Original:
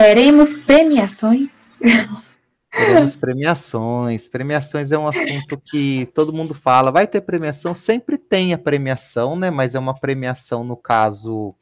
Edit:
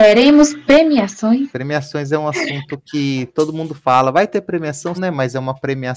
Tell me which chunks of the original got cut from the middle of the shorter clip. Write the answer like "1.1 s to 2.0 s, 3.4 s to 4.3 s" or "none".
1.5 s to 4.3 s, 7.7 s to 9.3 s

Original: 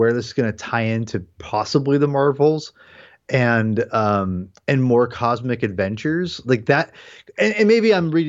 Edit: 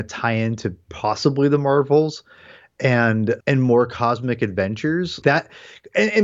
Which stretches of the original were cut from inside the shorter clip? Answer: 3.9 s to 4.6 s, 6.4 s to 6.6 s

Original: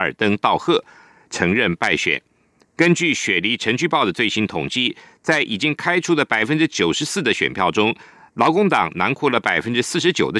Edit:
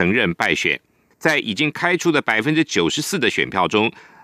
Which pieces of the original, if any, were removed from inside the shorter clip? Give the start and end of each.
2.5 s to 5.1 s

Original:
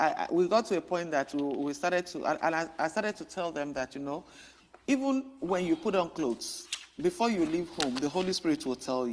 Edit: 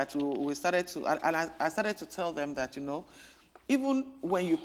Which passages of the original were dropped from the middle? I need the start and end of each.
none

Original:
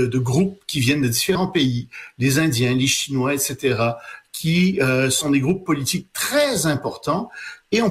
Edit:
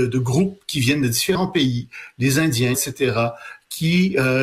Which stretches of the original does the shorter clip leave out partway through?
2.7 s to 3.4 s

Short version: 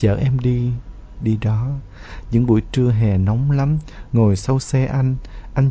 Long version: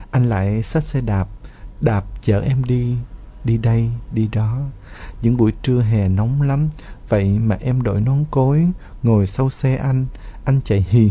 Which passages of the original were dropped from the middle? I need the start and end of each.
3.4 s to 4.1 s, 7.0 s to 9.0 s

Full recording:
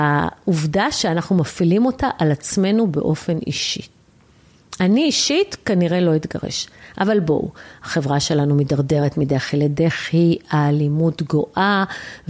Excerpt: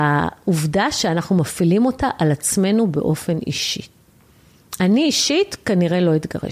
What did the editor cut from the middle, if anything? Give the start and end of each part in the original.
none

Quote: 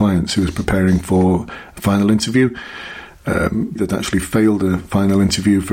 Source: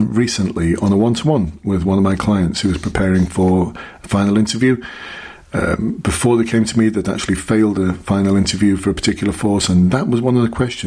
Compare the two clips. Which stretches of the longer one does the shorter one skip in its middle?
6.0 s to 6.9 s

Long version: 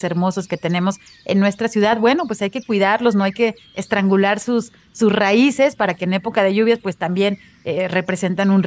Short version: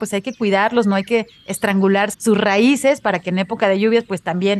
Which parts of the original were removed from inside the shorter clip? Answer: 4.4 s to 4.9 s

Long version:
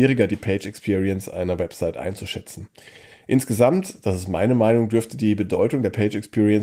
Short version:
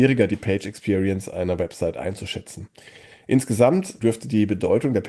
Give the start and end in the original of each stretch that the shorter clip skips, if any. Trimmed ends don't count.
4.0 s to 4.9 s

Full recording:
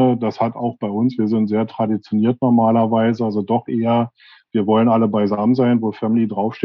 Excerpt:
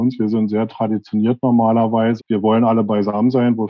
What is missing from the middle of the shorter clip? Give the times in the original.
3.2 s to 4.4 s

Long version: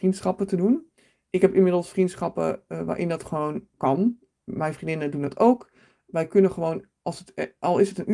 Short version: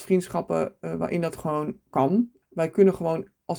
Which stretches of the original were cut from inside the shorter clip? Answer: 4.3 s to 6.0 s

